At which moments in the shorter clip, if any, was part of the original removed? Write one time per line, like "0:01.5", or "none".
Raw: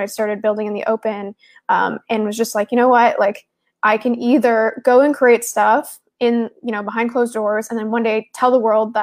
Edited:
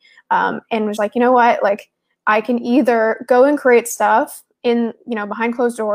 0:01.0

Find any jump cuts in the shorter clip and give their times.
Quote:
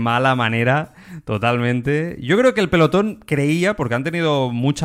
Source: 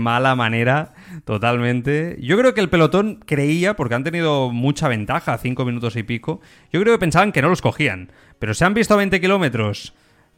none

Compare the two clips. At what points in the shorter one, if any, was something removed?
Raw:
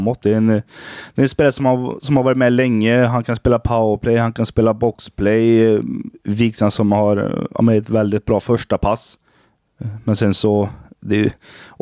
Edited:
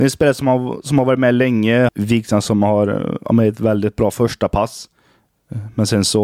0:01.9

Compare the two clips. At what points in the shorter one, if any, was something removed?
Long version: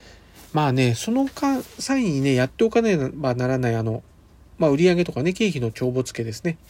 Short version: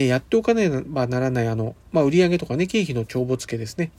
0:01.8

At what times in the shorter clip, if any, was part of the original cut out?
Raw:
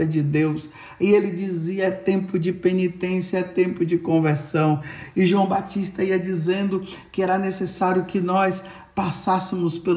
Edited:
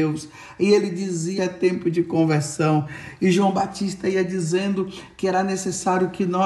0:01.4

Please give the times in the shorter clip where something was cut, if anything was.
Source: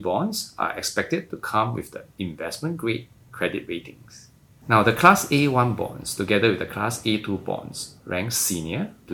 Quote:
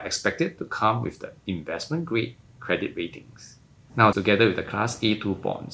0:04.1

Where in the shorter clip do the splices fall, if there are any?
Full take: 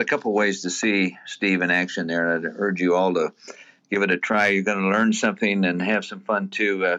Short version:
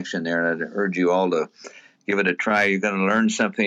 none

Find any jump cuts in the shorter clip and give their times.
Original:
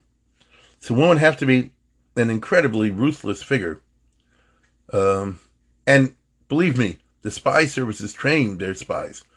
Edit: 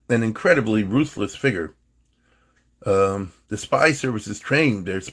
0:03.5

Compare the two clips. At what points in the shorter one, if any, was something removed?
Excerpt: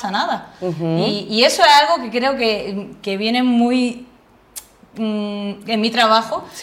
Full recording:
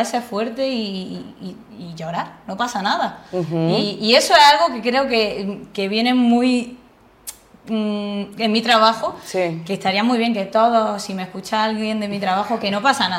none

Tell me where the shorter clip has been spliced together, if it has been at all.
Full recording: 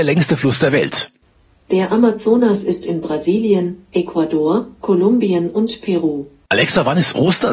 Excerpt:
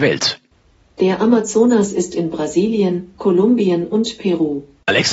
0:03.1

